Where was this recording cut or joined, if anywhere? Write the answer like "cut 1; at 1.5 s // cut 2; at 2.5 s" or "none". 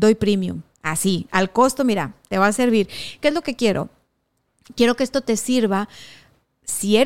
none